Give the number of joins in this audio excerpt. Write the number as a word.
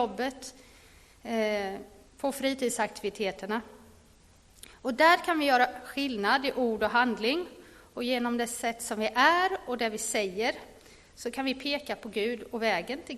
one